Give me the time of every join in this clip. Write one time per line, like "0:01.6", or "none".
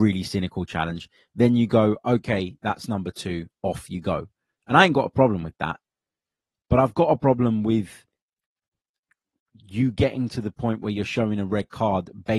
none

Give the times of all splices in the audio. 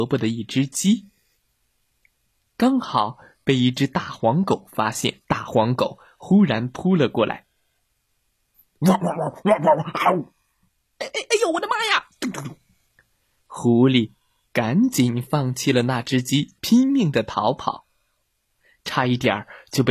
0:05.2
0:16.6

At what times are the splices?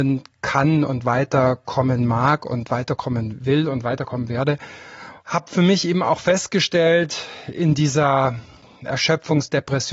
0:05.2

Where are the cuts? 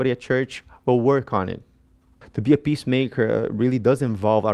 0:02.2

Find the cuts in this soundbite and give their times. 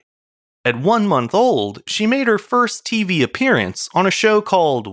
none

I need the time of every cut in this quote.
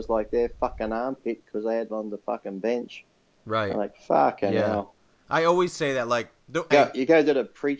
0:05.2
0:06.7

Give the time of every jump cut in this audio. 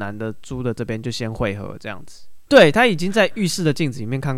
0:02.5

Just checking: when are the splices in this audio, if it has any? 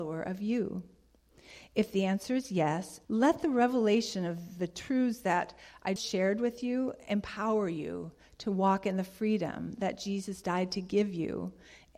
0:03.0
0:06.0

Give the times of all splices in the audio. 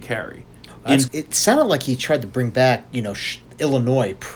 0:01.1

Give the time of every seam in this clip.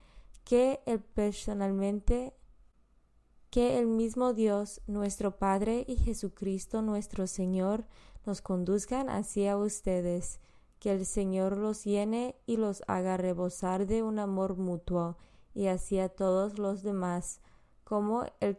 none

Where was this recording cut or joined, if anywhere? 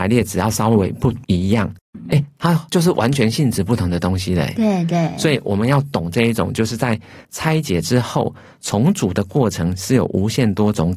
none

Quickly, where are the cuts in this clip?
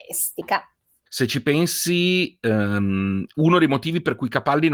0:01.1

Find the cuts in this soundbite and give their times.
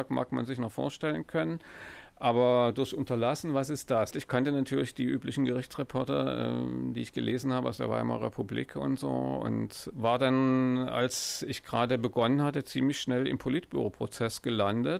0:04.1
0:09.9

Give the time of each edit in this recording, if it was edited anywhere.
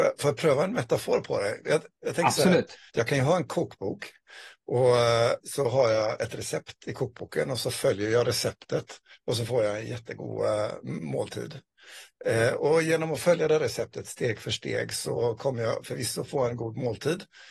0:02.9

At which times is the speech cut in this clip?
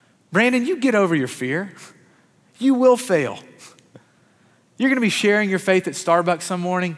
none

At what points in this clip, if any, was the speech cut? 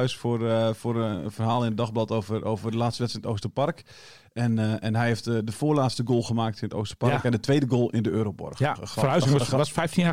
0:08.8

